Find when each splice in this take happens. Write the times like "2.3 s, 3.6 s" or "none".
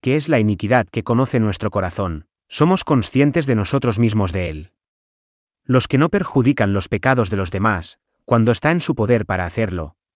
none